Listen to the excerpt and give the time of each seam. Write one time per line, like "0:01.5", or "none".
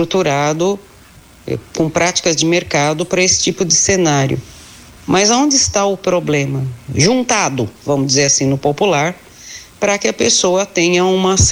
0:05.0
0:06.9

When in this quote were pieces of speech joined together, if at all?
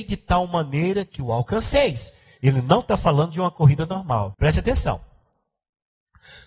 0:04.3

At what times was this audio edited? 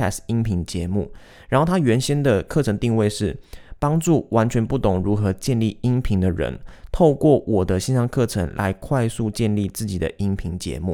none

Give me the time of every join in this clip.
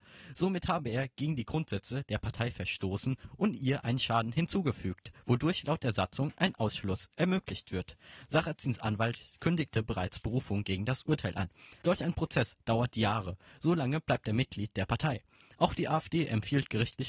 0:11.8

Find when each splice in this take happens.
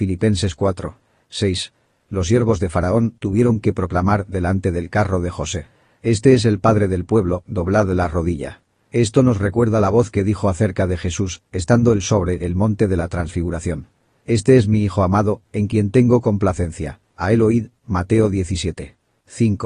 none

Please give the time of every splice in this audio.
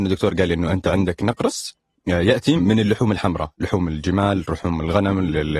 0:02.6

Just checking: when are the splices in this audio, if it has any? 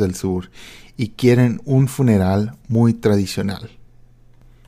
none

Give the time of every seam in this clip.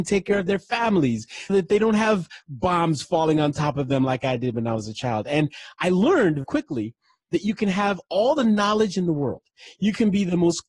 0:01.5
0:06.4

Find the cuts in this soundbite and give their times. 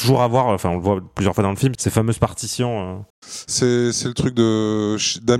0:01.8
0:03.1

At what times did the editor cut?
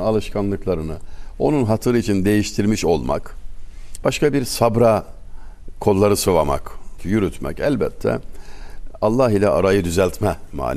0:04.0
0:07.0

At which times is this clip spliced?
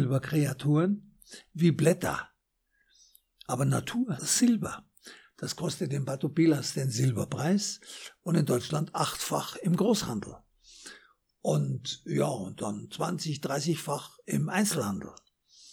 none

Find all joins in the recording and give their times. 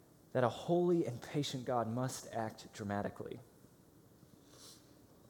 none

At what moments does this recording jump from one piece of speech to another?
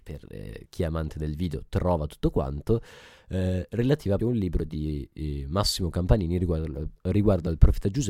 0:04.2

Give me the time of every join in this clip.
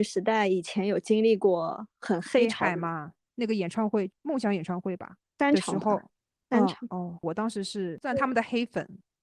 0:03.2
0:07.2

